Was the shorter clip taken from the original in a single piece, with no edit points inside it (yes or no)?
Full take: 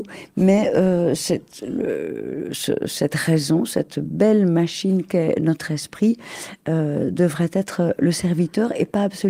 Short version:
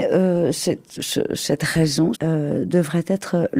no